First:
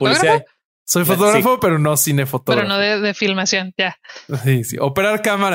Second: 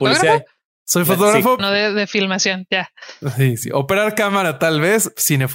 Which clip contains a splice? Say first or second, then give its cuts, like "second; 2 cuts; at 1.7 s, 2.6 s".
second; 1 cut; at 1.6 s